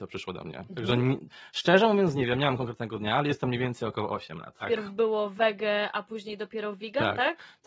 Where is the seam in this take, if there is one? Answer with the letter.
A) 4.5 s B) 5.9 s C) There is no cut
C